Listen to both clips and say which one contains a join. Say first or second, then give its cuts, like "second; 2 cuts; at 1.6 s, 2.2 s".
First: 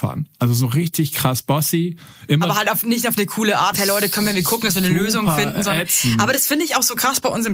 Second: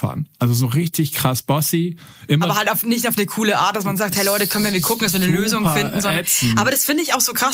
first; 1 cut; at 3.7 s